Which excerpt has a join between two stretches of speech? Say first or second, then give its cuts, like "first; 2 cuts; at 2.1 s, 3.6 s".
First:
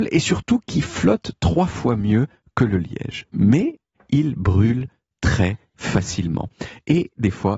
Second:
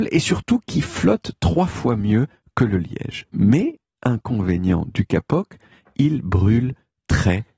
first; 1 cut; at 3.9 s